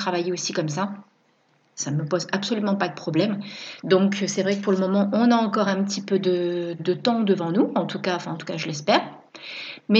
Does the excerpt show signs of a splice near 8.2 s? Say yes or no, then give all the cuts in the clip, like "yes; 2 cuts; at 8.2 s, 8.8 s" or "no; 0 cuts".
no; 2 cuts; at 3.8 s, 6.8 s